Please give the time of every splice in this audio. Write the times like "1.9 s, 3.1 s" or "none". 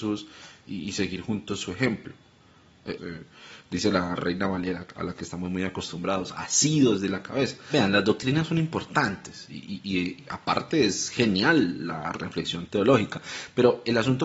3.0 s